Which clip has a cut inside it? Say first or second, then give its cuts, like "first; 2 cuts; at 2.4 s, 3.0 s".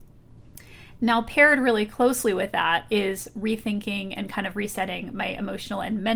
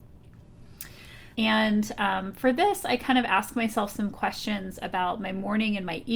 second; 1 cut; at 1.4 s